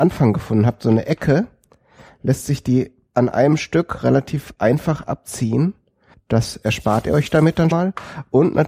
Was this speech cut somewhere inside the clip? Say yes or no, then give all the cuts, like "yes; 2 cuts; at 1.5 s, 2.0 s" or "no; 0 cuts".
yes; 2 cuts; at 6.1 s, 7.7 s